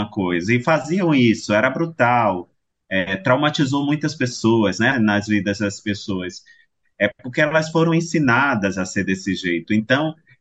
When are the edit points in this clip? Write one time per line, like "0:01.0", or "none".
0:04.9
0:06.8